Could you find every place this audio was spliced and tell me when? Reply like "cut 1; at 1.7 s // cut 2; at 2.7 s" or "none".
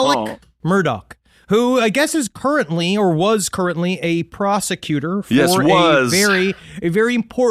none